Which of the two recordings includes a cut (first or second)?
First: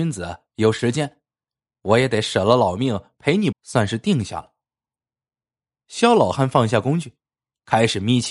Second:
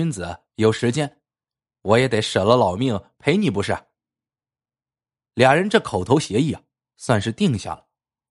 first